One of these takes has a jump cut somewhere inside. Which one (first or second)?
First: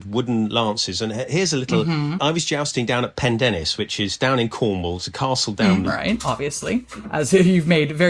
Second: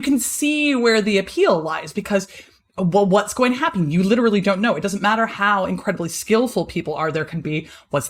first